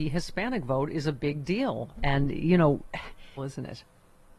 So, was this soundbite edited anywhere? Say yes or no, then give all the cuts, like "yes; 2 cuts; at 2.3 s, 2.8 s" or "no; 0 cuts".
yes; 1 cut; at 3.4 s